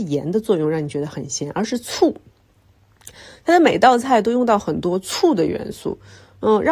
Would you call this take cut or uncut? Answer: uncut